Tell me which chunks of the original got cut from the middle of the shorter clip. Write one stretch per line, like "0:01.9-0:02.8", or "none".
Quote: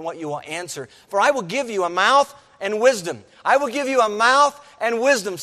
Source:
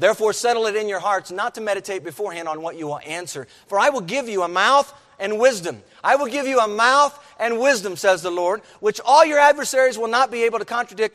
none